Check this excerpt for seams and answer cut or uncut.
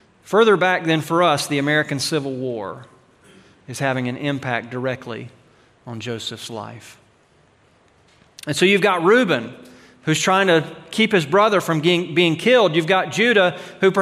uncut